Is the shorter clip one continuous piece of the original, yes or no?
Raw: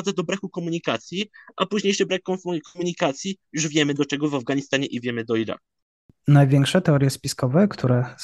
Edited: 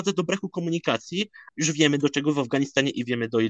no